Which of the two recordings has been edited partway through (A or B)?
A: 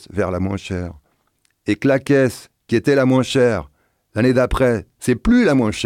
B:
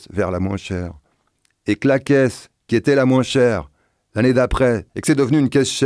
B